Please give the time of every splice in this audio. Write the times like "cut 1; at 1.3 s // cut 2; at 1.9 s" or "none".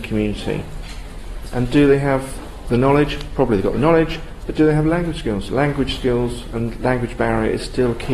cut 1; at 1.5 s

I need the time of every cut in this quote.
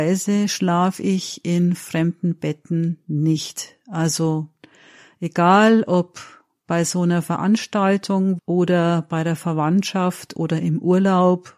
cut 1; at 8.4 s

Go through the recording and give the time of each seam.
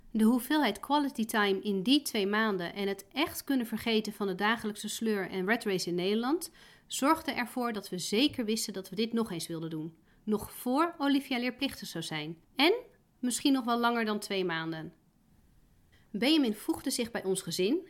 cut 1; at 12.4 s

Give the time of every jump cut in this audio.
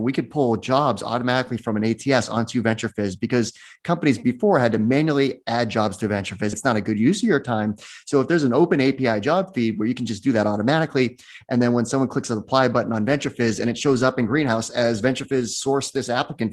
cut 1; at 6.5 s

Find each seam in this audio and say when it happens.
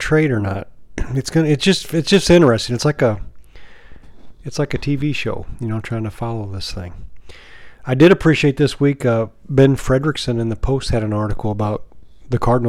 none

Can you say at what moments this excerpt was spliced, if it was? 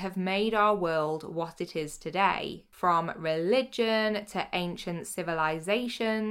none

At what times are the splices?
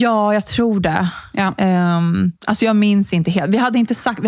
cut 1; at 2.4 s

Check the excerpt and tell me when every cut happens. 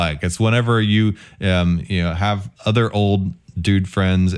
cut 1; at 2.6 s

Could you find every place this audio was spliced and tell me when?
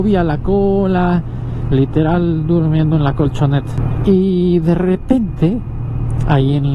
cut 1; at 1.7 s

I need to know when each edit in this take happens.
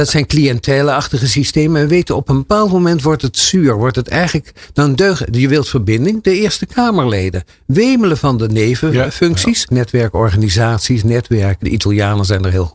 cut 1; at 9.7 s // cut 2; at 11.6 s

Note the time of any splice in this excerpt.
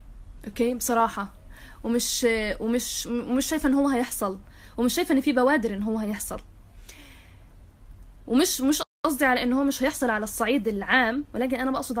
none

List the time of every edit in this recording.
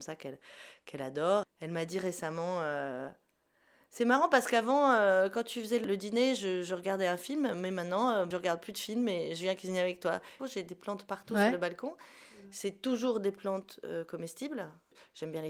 cut 1; at 1.4 s // cut 2; at 10.4 s

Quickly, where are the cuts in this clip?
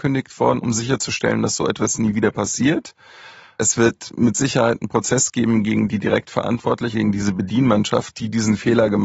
cut 1; at 6.9 s

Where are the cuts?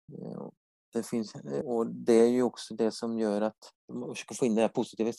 cut 1; at 1.6 s // cut 2; at 3.8 s

